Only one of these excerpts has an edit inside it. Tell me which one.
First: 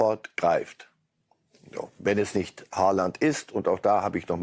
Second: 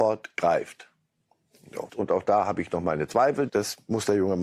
second; 2 cuts; at 1.9 s, 3.5 s

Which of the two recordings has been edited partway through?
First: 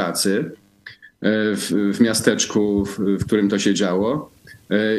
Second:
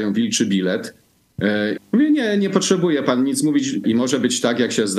second; 2 cuts; at 1.8 s, 3.8 s

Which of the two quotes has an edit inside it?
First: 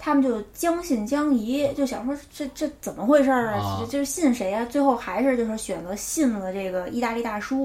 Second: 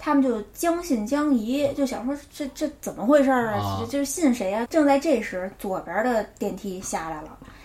second; 1 cut; at 4.7 s

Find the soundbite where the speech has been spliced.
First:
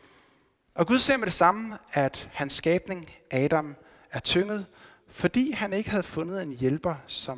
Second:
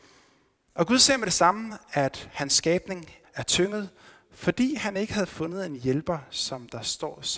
second; 1 cut; at 3.2 s

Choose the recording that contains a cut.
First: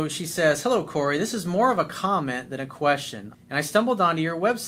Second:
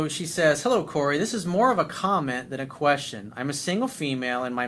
first; 1 cut; at 3.3 s

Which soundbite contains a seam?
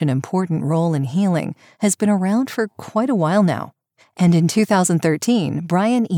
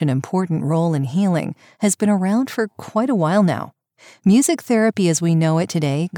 first; 1 cut; at 4.0 s

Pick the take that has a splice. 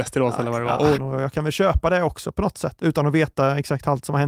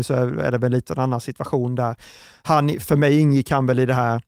first; 2 cuts; at 0.9 s, 2.8 s

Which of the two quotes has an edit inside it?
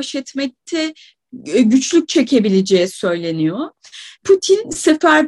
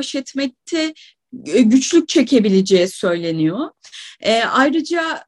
first; 1 cut; at 4.1 s

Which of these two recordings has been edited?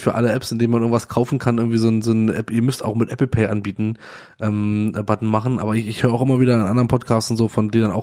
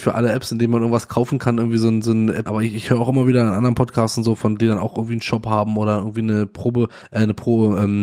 second; 1 cut; at 2.5 s

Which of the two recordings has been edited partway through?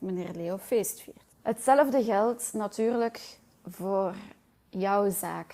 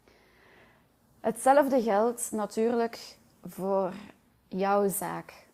first; 1 cut; at 1.3 s

